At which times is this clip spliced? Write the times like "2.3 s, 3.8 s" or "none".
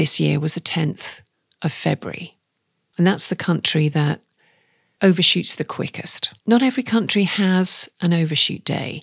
6.4 s